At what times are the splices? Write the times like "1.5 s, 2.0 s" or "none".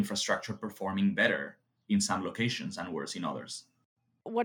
none